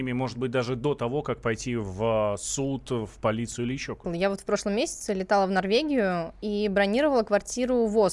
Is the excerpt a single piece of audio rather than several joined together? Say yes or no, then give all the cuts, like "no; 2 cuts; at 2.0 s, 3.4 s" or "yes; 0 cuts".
no; 1 cut; at 4.0 s